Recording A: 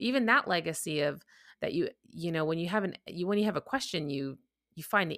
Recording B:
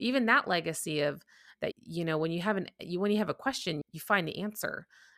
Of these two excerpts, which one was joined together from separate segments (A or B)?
B